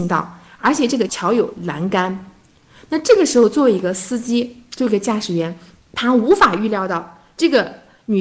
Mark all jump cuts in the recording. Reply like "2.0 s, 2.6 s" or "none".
1.1 s